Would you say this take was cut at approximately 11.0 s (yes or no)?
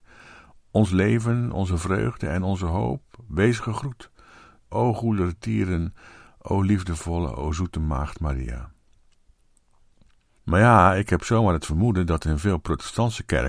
no